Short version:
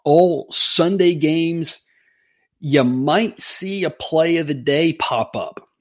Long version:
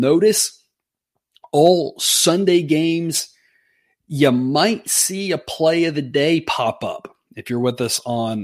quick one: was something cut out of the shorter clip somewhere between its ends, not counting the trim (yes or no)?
no